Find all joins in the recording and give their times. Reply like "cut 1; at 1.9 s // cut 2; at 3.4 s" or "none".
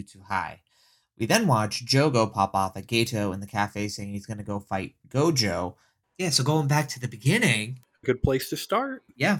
cut 1; at 6.0 s // cut 2; at 8.0 s